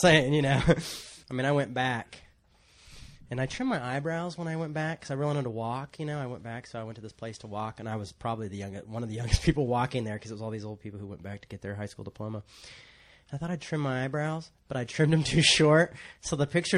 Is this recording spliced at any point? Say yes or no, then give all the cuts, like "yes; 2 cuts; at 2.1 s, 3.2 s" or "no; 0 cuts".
yes; 1 cut; at 1.2 s